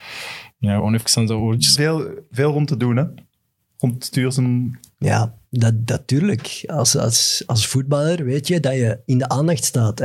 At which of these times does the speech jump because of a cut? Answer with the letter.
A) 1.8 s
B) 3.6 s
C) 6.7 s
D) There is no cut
A